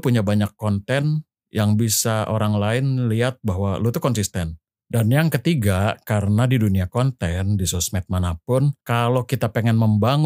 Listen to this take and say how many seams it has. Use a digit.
2